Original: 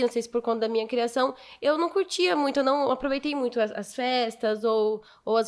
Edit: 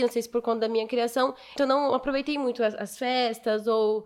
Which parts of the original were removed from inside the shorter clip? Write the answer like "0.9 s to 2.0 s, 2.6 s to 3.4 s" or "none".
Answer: 1.6 s to 2.5 s